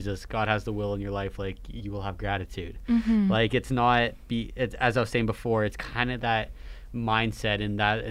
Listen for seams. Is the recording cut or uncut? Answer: uncut